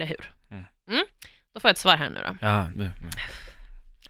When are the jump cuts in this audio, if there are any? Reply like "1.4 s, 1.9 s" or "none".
2.7 s